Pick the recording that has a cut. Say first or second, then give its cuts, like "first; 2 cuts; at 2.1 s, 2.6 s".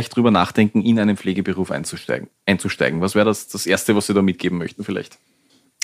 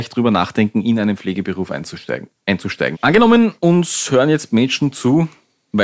second; 1 cut; at 2.9 s